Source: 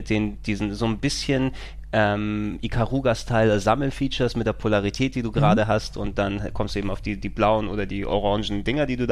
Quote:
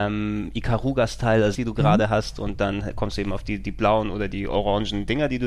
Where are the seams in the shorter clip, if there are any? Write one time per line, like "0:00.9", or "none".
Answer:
0:01.5